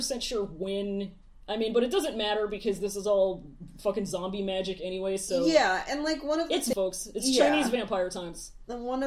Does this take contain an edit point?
yes; 1 cut; at 6.7 s

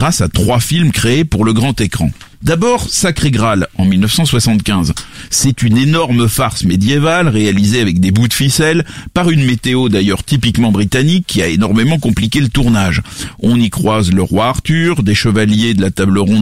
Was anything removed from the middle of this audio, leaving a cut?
yes; 1 cut; at 2.3 s

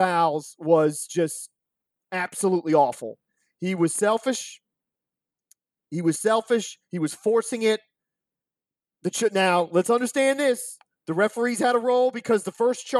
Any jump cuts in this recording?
no; 0 cuts

